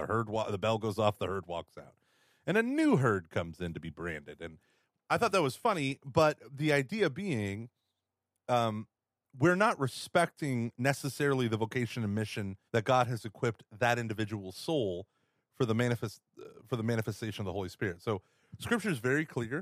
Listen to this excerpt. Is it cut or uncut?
cut